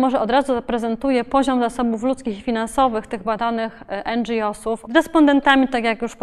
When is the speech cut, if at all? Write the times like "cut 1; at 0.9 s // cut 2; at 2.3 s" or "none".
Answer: cut 1; at 4.9 s